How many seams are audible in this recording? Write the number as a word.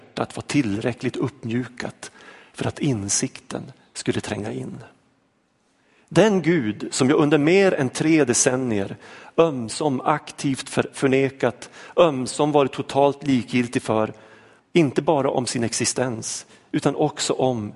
one